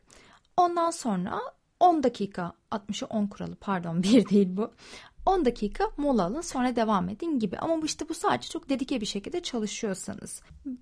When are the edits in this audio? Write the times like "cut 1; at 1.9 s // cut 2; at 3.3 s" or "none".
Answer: none